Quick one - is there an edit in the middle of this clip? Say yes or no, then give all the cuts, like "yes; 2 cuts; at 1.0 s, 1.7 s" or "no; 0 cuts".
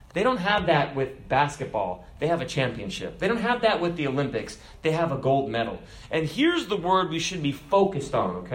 no; 0 cuts